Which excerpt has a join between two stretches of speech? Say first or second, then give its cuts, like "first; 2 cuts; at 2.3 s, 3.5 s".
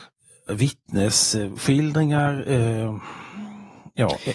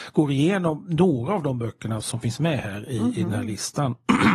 second; 1 cut; at 2.0 s